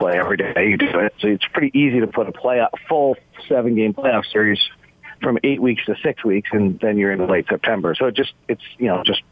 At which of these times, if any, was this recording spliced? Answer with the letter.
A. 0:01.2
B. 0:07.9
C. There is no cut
A